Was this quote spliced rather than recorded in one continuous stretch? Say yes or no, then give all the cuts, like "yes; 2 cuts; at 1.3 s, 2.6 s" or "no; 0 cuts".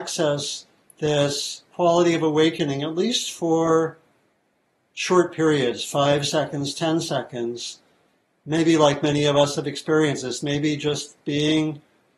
no; 0 cuts